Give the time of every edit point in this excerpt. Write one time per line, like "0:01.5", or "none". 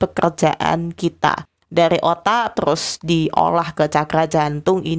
0:02.5